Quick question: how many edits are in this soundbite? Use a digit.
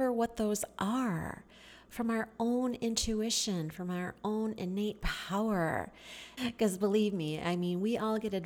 1